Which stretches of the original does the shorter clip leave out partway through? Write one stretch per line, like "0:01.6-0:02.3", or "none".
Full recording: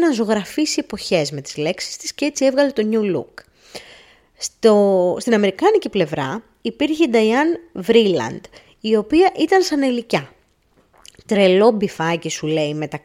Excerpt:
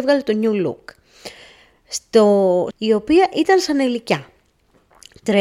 0:05.2-0:08.7